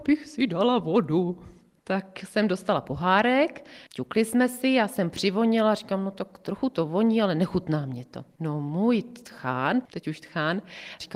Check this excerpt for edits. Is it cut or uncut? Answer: uncut